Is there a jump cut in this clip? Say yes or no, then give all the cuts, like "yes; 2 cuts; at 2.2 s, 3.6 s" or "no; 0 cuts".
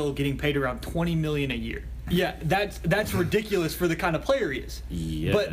yes; 2 cuts; at 2.1 s, 3.1 s